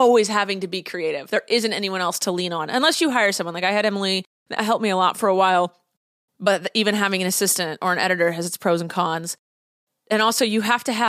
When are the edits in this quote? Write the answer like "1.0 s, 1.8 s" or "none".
none